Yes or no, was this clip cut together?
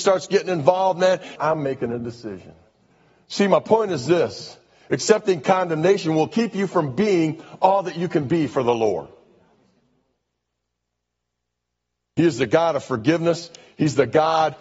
yes